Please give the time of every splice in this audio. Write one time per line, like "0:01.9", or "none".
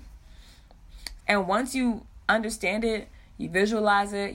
0:01.2